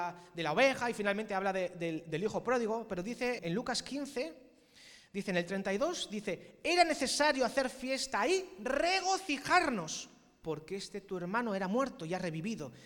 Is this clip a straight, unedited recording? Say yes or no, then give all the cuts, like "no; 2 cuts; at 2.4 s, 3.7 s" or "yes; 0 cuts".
no; 1 cut; at 3.4 s